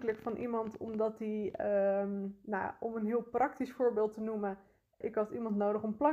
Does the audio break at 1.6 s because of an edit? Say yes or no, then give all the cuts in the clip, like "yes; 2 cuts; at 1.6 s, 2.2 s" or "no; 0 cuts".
no; 1 cut; at 5.0 s